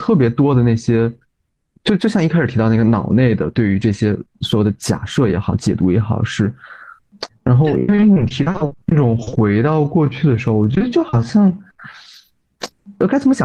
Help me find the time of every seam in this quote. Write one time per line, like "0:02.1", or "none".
0:07.3
0:08.8